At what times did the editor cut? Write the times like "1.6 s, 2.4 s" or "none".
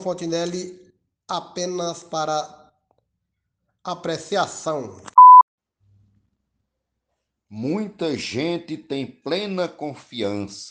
none